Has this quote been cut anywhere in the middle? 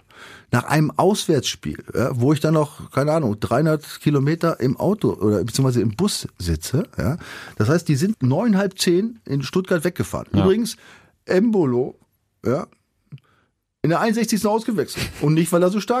yes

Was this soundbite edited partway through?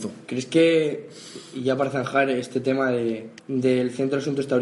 yes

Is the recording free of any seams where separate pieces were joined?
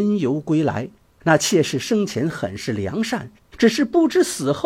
no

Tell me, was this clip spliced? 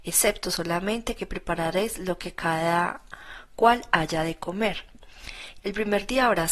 yes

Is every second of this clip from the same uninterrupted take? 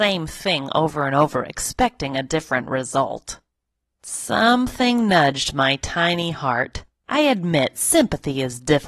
yes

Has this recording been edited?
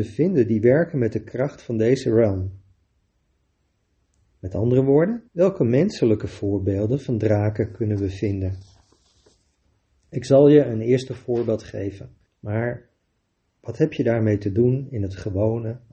yes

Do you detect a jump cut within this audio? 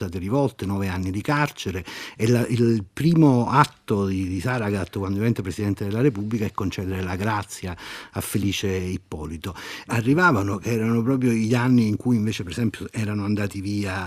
yes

